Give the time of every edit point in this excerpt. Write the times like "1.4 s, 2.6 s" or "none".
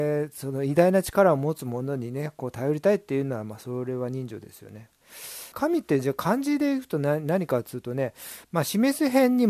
5.5 s